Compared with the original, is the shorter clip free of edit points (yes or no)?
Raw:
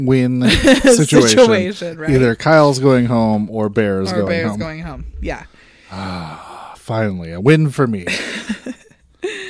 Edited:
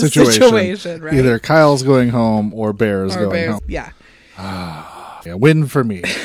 no